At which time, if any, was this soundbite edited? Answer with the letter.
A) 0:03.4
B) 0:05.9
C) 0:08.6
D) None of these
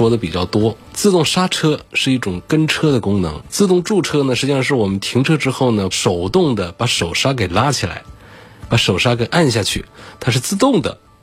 B